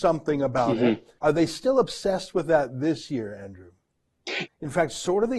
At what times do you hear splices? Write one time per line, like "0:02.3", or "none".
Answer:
0:01.2
0:04.5